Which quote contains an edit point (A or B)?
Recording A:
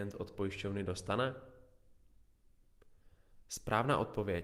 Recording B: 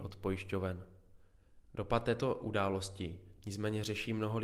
B